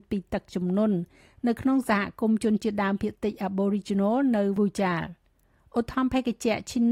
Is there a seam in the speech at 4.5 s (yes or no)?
yes